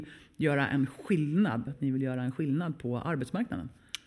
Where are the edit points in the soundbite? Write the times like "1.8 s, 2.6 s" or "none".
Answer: 1.7 s